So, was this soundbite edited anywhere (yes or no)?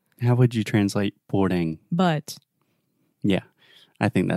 no